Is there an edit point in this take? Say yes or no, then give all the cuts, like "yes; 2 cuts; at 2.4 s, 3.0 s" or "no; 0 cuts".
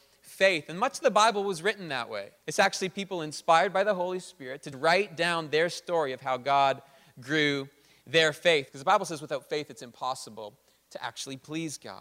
yes; 3 cuts; at 2.4 s, 4.7 s, 8.7 s